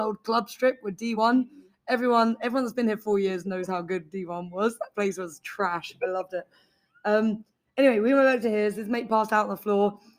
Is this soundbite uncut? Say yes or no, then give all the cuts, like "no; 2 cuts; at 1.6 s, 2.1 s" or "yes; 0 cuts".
yes; 0 cuts